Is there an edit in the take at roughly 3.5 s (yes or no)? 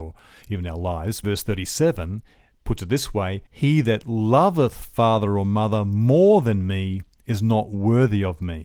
yes